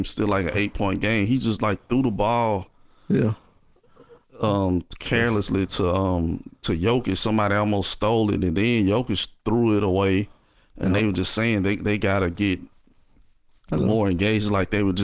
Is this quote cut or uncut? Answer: uncut